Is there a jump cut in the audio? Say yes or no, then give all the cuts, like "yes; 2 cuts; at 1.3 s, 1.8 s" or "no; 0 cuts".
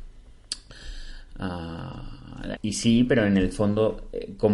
yes; 1 cut; at 2.6 s